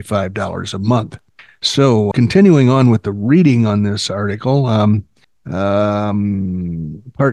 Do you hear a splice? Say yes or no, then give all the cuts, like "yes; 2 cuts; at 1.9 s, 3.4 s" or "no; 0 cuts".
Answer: yes; 1 cut; at 2.1 s